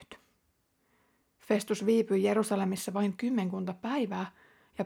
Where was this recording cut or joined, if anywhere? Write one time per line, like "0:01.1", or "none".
none